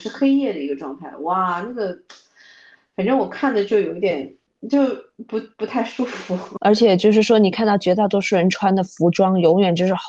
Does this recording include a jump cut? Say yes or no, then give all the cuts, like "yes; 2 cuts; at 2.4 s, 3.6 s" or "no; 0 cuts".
no; 0 cuts